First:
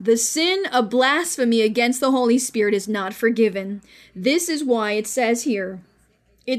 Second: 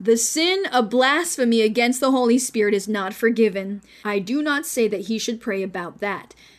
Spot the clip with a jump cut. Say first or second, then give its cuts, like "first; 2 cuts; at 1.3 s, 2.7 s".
second; 1 cut; at 4.0 s